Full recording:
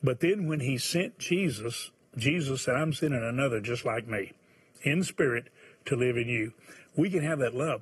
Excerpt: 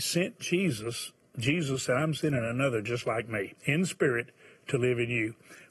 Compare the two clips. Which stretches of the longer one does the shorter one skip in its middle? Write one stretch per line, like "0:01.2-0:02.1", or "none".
0:04.4-0:04.8